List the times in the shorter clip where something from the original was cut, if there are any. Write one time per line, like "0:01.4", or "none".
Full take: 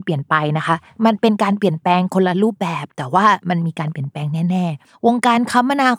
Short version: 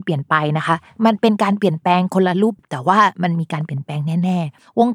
0:02.6